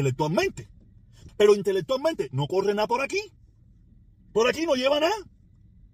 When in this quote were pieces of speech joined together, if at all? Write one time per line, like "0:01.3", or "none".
0:01.3